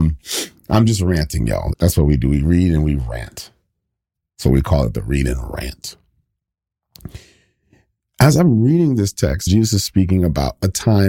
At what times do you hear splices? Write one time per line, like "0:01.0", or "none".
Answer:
0:01.7
0:09.5